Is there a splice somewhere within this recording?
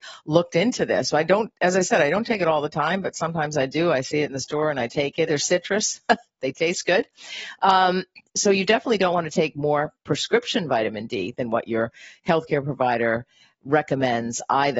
yes; 1 cut; at 5.3 s

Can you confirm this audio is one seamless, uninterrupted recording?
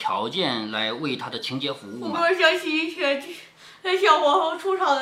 yes; 0 cuts

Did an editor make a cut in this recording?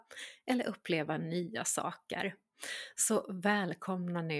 no; 0 cuts

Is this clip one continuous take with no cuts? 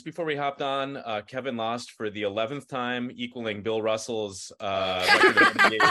yes; 0 cuts

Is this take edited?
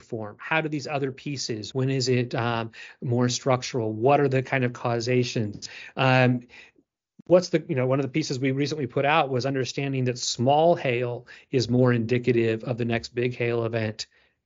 yes; 1 cut; at 1.7 s

